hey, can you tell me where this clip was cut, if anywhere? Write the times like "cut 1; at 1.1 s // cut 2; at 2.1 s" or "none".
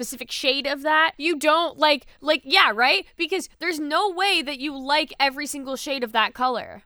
cut 1; at 1.2 s